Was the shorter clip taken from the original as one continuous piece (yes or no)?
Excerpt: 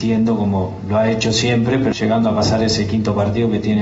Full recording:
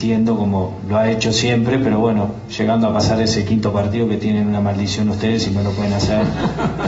no